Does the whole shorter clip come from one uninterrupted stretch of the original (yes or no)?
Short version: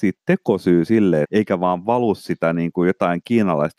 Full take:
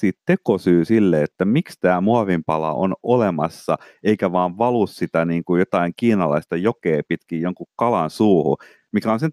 no